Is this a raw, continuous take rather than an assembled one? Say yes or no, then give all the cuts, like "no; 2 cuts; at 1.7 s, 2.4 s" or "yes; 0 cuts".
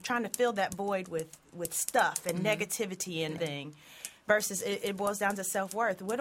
no; 1 cut; at 3.4 s